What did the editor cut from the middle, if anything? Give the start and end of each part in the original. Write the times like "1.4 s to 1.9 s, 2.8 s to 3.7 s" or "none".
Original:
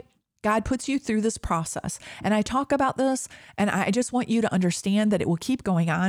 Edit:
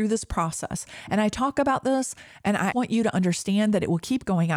3.9 s to 4.1 s